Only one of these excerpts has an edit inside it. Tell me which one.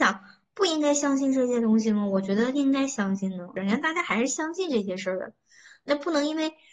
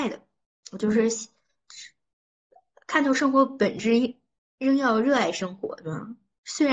first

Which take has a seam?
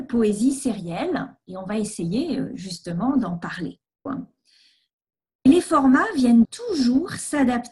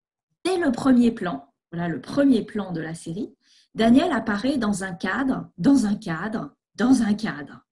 first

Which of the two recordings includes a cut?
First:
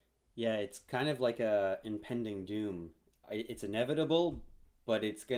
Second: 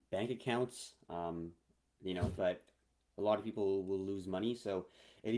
second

